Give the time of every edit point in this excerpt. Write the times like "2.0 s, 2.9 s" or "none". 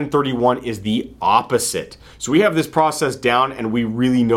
2.1 s